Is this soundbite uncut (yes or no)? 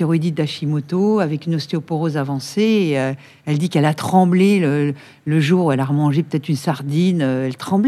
yes